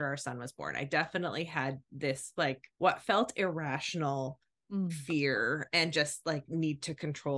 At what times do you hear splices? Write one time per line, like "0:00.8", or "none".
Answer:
0:02.7